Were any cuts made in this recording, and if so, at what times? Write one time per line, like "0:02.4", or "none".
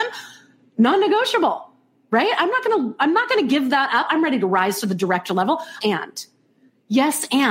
0:04.1
0:05.8